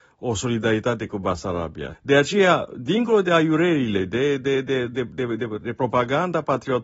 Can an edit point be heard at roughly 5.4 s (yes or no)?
no